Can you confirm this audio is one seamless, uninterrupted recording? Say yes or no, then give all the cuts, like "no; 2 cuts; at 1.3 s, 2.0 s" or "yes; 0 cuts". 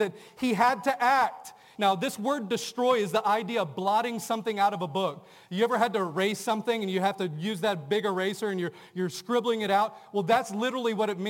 no; 1 cut; at 1.7 s